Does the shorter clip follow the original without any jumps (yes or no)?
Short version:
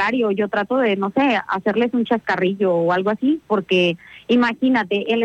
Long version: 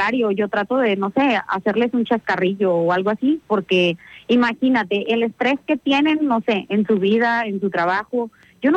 yes